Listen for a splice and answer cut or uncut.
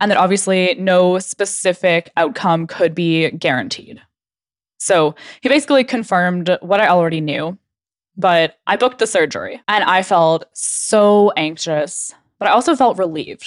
cut